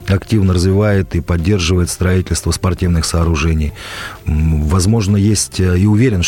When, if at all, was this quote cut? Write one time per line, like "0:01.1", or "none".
none